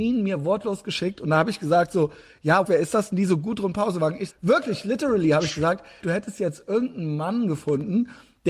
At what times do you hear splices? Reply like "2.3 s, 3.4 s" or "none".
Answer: 2.6 s, 4.3 s, 6.0 s